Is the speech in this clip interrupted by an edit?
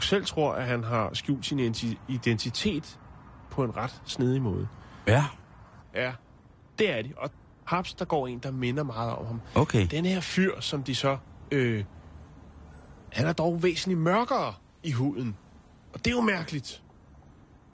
yes; 2 cuts; at 5.8 s, 13.1 s

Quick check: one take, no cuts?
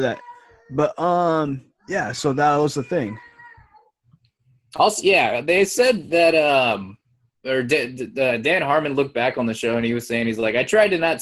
yes; 0 cuts

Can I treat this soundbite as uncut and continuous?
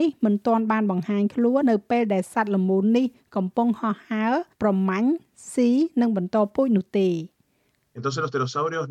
no; 2 cuts; at 1.6 s, 4.5 s

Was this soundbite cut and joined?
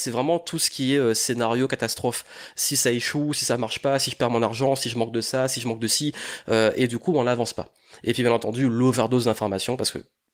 no; 0 cuts

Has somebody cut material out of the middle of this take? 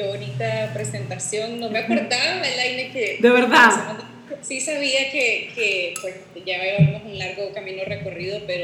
yes; 1 cut; at 4.4 s

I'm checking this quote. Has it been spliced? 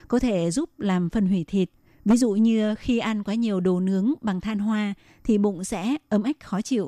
no; 0 cuts

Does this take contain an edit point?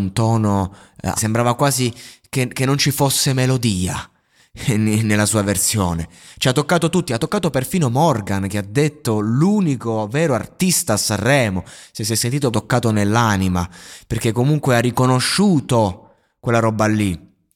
yes; 2 cuts; at 1.2 s, 12.5 s

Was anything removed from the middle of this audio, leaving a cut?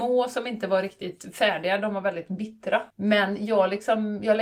yes; 1 cut; at 2.9 s

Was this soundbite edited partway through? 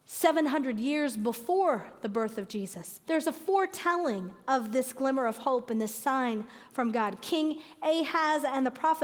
yes; 1 cut; at 3.0 s

